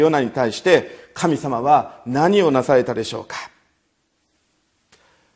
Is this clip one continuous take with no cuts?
yes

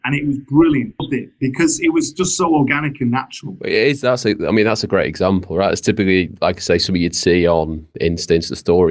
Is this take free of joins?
no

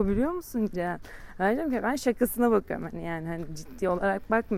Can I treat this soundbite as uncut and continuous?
yes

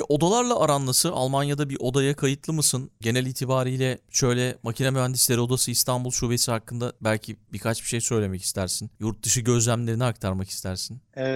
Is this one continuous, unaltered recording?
yes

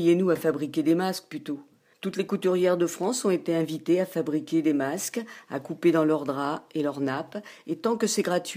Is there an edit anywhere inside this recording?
yes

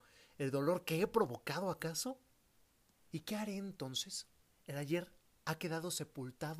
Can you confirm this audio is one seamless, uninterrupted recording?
no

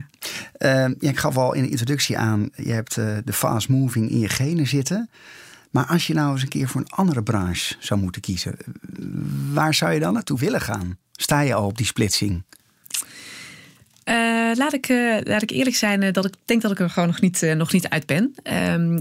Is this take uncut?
no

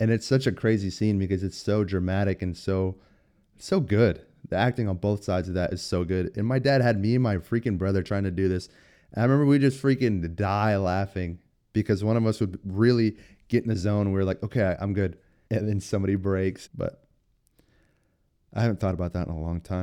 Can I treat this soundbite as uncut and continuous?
no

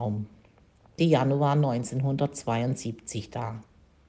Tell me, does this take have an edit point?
yes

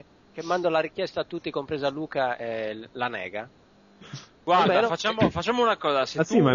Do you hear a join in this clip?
no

